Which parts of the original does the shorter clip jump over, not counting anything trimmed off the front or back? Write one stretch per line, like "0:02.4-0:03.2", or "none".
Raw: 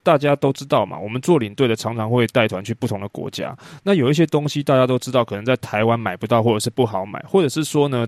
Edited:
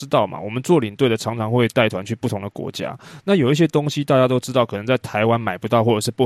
none